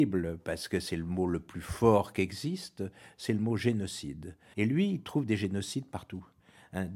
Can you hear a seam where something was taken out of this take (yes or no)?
yes